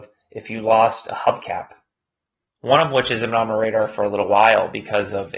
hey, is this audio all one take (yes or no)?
no